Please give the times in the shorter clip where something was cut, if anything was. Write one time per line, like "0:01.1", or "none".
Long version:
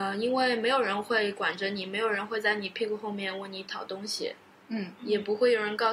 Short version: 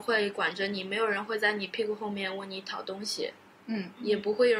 none